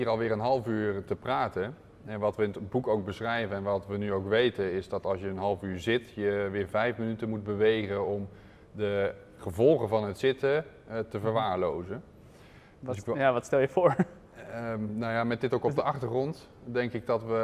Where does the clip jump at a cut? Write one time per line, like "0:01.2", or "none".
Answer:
none